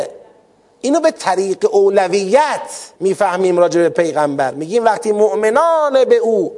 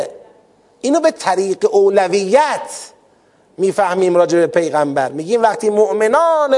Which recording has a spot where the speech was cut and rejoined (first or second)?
first